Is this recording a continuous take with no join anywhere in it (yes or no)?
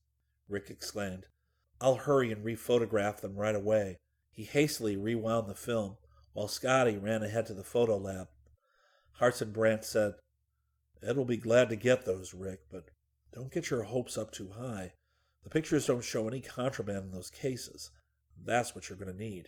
no